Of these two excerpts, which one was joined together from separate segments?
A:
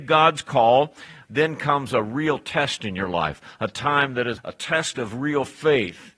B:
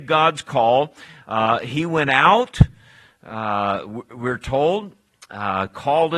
A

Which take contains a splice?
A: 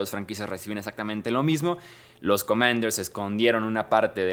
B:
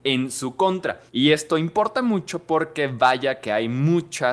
B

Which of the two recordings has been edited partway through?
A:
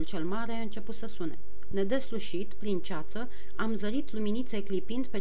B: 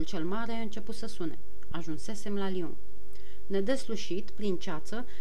A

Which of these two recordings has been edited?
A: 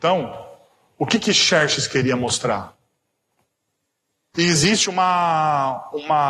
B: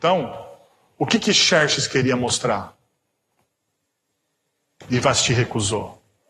A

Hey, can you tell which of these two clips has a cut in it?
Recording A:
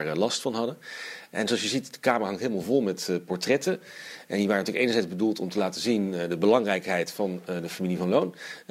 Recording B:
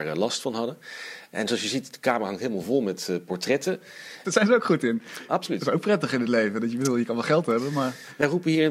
B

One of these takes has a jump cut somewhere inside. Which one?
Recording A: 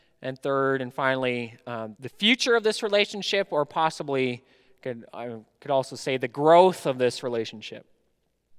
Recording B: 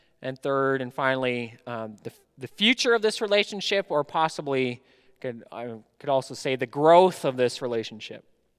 A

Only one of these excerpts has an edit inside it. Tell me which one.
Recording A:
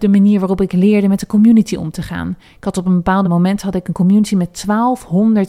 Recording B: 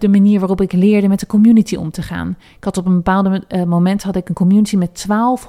A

